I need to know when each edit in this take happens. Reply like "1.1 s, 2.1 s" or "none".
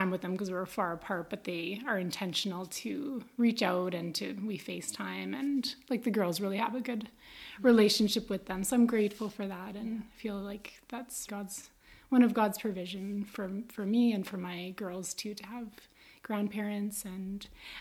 11.3 s